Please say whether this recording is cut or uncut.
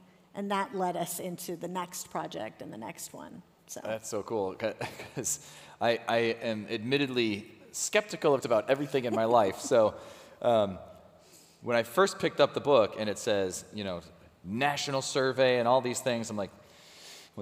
cut